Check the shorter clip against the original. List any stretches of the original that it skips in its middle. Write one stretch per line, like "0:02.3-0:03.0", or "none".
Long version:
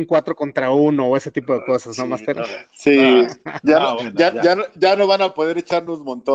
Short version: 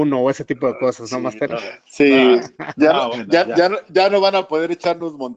none

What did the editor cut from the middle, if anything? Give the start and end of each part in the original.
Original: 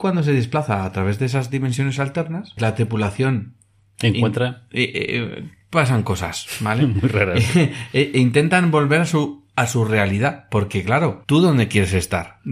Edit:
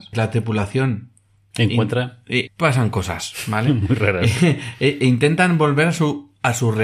0:04.9-0:05.6

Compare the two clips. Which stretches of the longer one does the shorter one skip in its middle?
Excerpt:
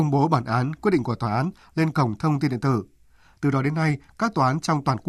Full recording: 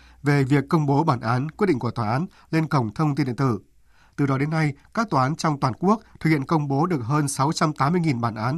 none

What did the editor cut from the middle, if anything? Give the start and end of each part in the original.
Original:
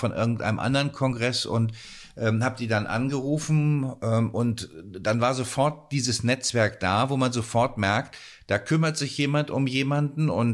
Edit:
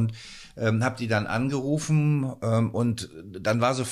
none

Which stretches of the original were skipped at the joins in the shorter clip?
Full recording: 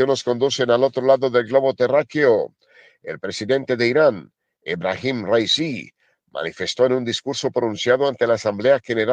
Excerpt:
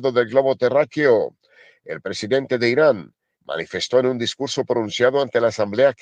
0:04.5-0:06.2

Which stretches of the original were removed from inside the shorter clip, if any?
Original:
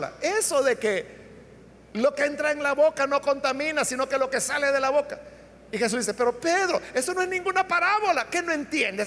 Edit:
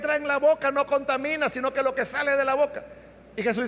none

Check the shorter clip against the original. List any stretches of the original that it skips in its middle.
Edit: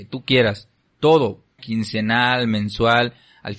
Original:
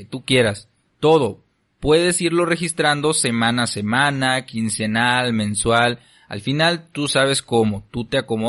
0:01.6-0:04.4

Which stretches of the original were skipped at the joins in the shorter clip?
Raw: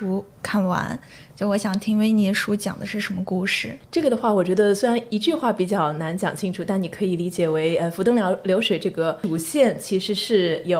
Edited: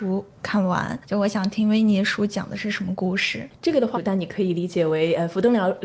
0:01.0-0:01.3
0:04.2-0:06.6

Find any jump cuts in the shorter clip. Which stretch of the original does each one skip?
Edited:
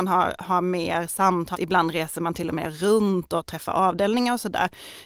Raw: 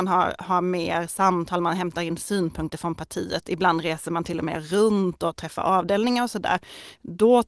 0:01.5-0:03.4

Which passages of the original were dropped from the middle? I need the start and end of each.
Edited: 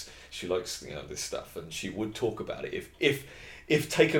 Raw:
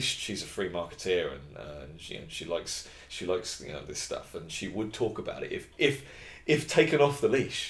none

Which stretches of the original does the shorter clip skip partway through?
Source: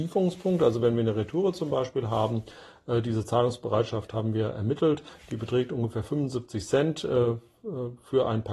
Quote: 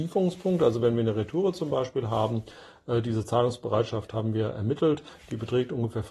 none

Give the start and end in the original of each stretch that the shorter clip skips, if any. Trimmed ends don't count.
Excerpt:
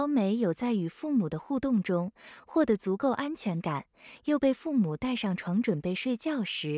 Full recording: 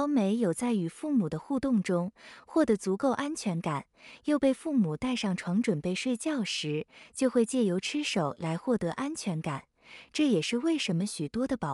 none

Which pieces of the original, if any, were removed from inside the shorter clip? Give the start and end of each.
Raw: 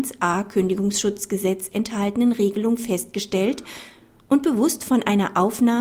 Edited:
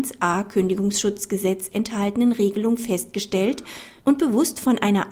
0:04.0-0:04.2

